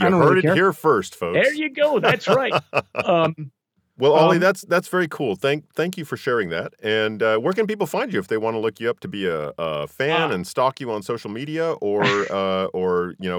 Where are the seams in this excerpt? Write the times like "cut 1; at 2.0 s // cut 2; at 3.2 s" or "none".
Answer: none